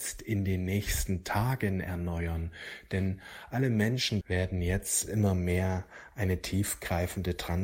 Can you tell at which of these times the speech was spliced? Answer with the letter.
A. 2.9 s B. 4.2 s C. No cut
B